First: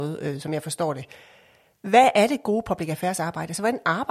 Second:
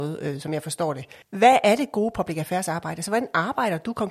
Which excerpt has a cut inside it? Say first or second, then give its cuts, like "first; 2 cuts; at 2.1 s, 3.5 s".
second; 1 cut; at 1.2 s